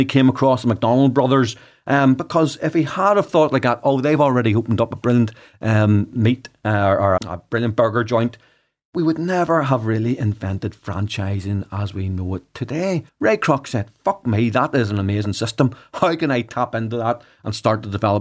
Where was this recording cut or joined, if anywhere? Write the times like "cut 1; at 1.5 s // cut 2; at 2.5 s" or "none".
cut 1; at 7.2 s // cut 2; at 13.1 s